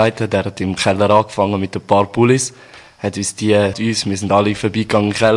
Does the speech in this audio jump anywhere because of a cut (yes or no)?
yes